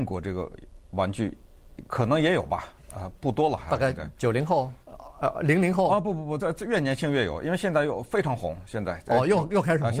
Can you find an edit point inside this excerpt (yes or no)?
no